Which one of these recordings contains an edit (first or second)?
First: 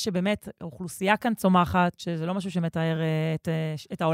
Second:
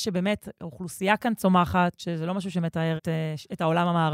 second